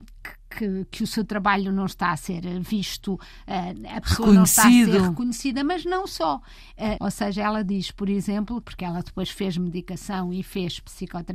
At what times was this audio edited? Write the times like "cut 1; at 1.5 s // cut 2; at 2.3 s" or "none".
cut 1; at 7.0 s // cut 2; at 8.6 s